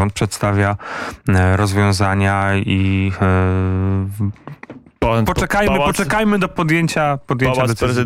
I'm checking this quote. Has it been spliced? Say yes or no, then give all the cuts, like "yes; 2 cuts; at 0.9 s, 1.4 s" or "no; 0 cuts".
no; 0 cuts